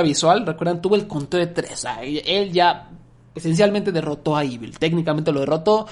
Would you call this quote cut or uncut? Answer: uncut